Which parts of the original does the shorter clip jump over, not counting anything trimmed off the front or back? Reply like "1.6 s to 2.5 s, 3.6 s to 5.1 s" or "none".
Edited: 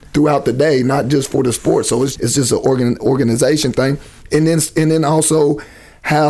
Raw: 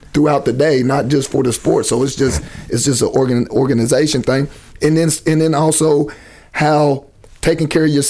2.2 s to 2.7 s